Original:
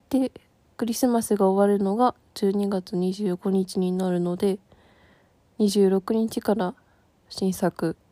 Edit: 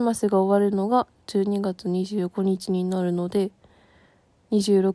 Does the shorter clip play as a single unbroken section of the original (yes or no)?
yes